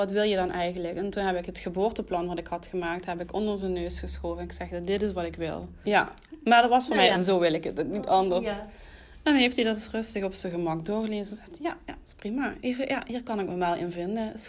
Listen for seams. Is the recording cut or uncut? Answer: cut